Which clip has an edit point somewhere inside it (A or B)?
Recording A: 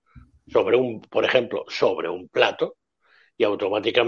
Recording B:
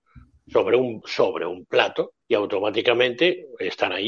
B